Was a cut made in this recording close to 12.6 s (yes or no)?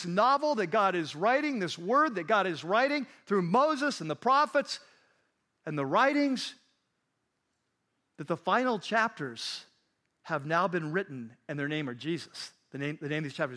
no